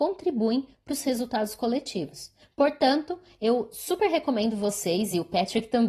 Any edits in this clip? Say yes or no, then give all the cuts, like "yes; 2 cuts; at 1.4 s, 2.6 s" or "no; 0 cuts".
no; 0 cuts